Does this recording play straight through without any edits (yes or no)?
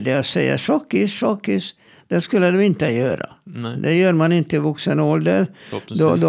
yes